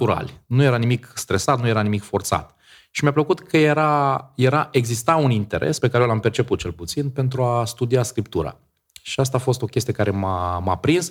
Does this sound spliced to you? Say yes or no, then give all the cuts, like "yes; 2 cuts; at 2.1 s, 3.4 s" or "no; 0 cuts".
no; 0 cuts